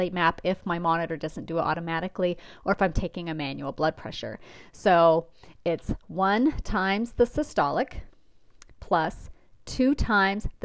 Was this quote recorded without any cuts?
yes; 0 cuts

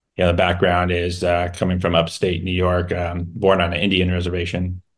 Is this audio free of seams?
yes; 0 cuts

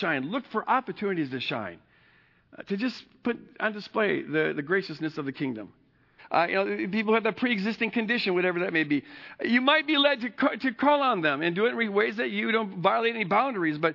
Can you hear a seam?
yes; 1 cut; at 6.2 s

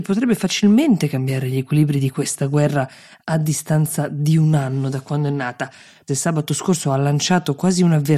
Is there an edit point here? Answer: yes; 1 cut; at 6.1 s

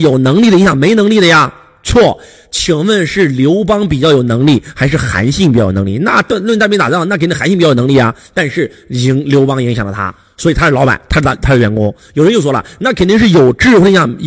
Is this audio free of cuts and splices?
yes; 0 cuts

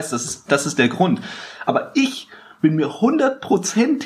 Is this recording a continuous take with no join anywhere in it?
yes; 0 cuts

